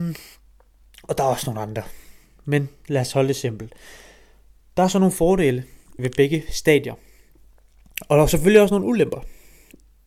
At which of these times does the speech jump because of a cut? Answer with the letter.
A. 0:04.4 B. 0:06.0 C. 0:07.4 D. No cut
B